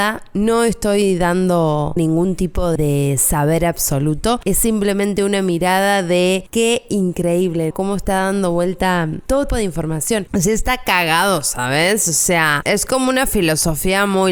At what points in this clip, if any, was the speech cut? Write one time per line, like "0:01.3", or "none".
0:09.5